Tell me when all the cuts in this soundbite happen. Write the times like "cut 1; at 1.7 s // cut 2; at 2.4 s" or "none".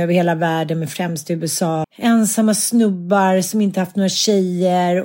cut 1; at 1.8 s